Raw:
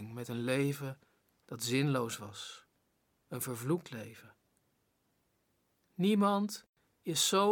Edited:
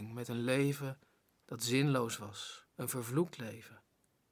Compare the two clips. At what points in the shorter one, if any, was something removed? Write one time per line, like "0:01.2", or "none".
0:02.7